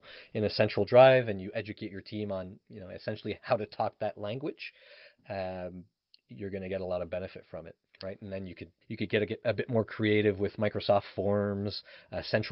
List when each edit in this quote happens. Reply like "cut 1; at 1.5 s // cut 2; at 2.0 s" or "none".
cut 1; at 8.8 s